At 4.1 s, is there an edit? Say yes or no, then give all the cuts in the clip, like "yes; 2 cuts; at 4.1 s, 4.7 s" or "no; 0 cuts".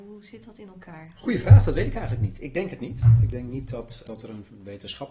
yes; 1 cut; at 4.1 s